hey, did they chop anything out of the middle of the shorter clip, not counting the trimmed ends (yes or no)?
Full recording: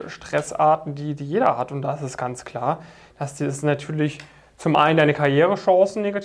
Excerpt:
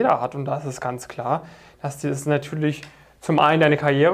no